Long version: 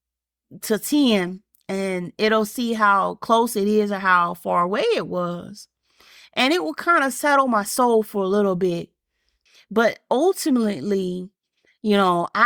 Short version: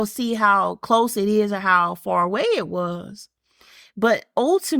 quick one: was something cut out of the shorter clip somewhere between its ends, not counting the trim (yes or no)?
yes